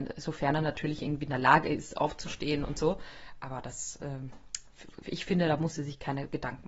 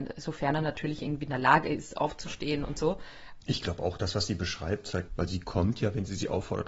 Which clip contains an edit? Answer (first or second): second